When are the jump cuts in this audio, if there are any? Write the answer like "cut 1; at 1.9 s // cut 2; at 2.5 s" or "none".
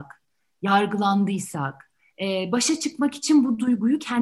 none